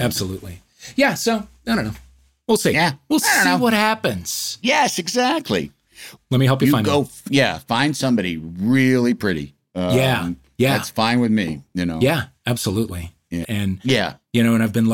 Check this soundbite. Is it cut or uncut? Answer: cut